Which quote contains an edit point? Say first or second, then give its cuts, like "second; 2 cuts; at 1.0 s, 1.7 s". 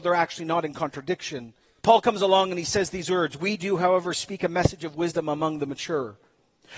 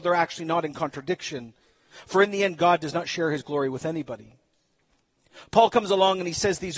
first; 1 cut; at 1.8 s